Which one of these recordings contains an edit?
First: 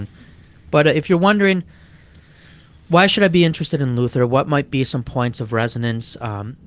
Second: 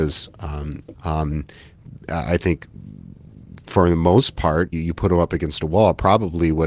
second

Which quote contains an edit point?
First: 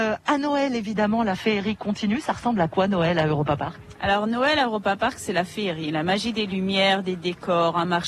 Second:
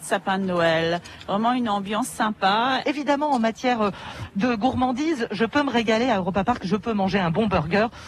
second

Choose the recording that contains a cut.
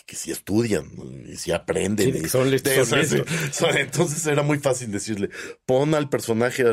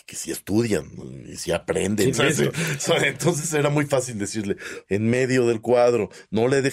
second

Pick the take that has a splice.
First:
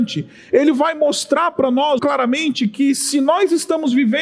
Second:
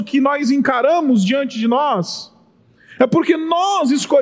first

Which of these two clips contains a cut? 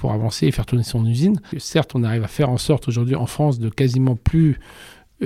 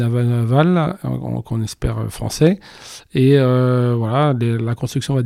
first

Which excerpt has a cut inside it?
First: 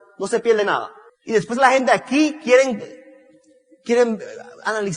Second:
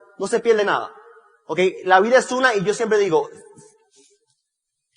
first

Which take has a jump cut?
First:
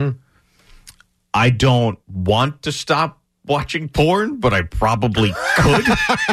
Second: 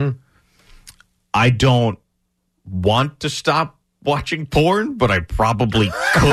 first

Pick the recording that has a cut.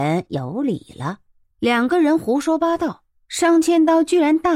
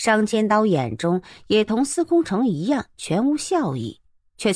first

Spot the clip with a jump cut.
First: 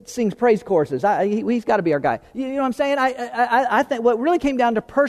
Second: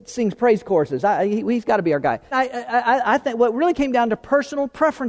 second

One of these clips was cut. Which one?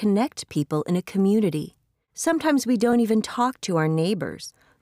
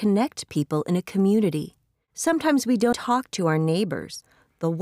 second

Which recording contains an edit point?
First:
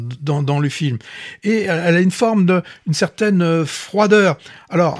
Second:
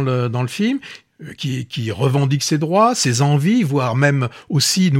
second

